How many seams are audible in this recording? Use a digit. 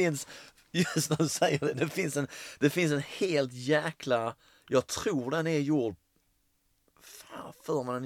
0